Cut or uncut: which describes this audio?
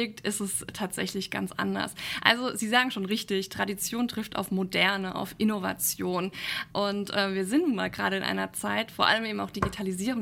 cut